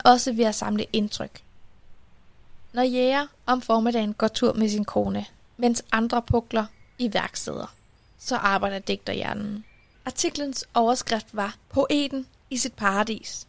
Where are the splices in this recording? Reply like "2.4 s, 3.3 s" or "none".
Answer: 9.9 s, 11.6 s